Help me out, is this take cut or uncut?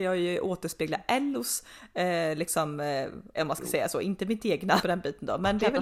cut